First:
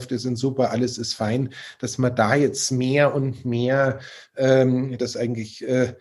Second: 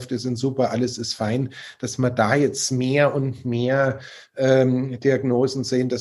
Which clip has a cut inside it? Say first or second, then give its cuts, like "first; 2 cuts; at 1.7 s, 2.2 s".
first; 1 cut; at 5.0 s